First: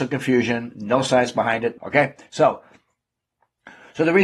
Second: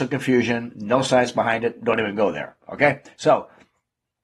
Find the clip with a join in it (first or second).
first